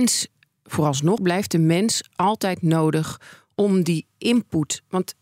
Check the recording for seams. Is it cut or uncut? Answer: cut